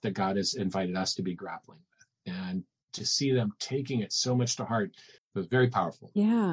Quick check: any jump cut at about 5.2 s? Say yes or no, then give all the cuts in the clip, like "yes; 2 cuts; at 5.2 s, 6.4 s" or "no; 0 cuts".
yes; 1 cut; at 5.2 s